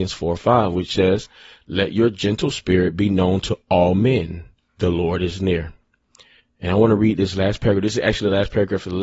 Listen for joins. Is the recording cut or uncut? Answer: uncut